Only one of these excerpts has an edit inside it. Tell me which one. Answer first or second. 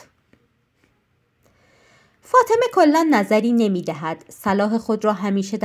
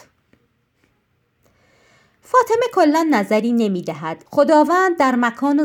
second